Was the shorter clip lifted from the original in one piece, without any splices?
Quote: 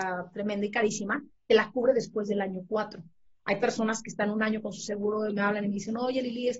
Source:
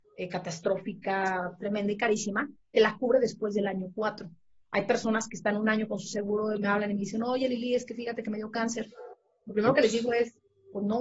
yes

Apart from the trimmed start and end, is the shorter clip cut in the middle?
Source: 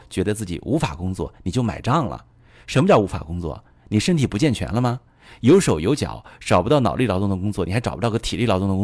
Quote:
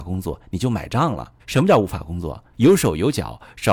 yes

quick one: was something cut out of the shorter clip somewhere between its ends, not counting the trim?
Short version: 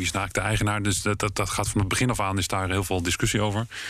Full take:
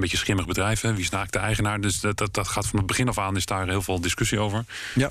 no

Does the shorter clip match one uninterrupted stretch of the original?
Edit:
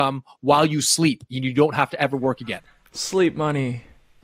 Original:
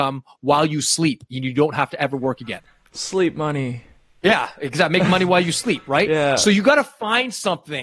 yes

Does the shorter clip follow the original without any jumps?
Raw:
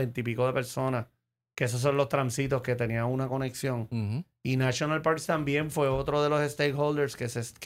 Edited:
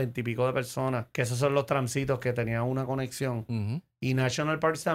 no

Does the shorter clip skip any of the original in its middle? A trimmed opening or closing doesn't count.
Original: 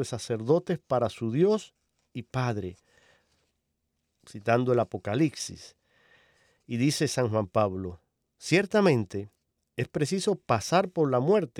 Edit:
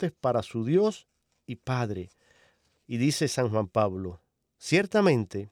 yes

